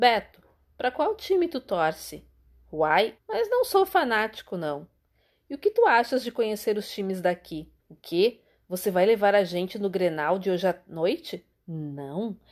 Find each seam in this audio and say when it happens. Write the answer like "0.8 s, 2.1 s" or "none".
3.2 s, 7.8 s, 11.5 s